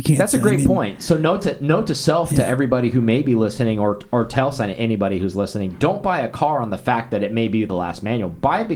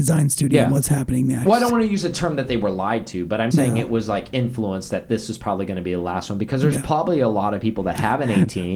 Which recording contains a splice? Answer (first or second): second